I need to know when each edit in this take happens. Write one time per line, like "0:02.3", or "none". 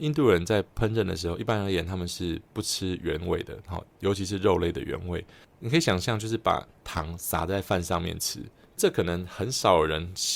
0:05.4

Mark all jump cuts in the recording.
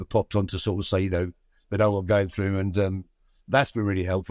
none

